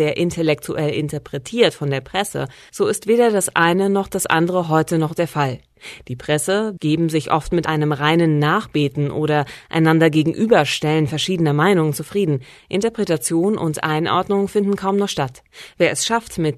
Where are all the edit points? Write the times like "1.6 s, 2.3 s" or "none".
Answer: 6.8 s

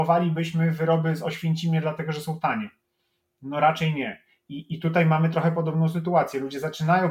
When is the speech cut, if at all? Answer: none

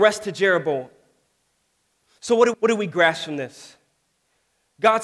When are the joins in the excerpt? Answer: 2.5 s

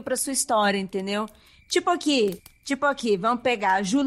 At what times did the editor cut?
none

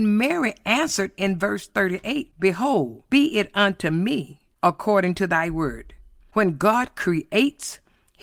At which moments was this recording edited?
3.1 s

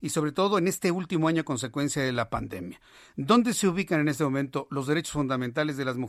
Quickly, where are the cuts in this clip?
none

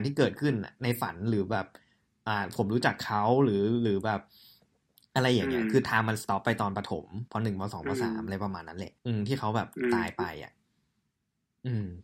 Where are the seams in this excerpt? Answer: 7.3 s, 9.0 s

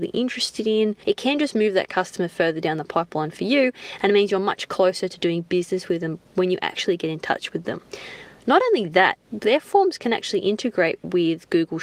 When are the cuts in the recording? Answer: 1.0 s, 9.3 s

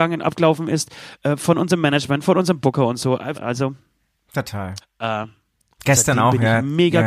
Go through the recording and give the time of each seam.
3.3 s, 4.8 s

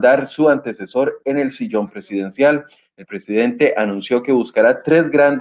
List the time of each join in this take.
none

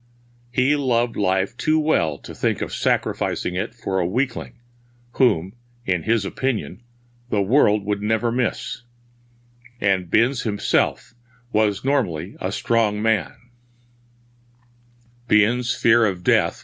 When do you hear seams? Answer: none

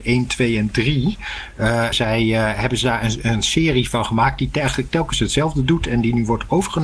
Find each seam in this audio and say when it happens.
1.9 s

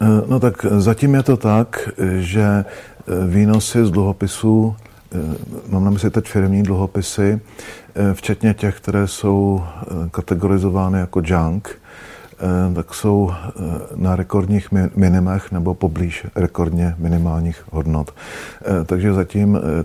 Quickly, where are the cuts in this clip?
none

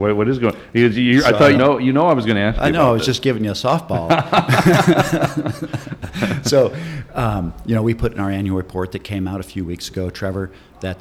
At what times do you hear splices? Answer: 1.5 s

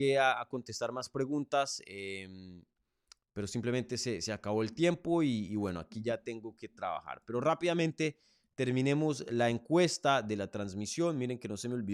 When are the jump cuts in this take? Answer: none

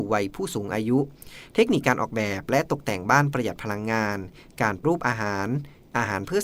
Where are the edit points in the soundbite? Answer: 4.8 s

